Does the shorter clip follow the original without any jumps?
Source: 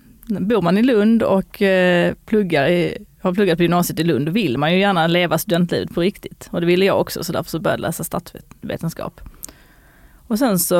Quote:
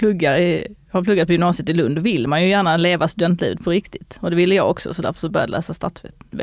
yes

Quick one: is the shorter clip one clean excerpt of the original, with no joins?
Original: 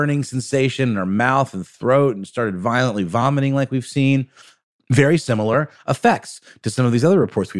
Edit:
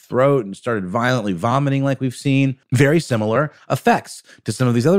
no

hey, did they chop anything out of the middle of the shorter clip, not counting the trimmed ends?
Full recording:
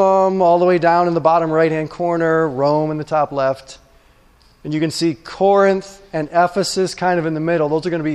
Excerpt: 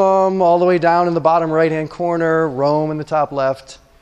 no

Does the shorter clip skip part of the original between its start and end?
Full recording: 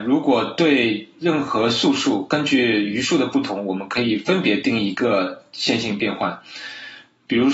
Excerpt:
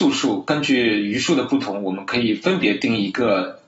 no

